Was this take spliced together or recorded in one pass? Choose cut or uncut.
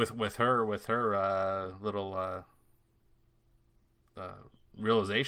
uncut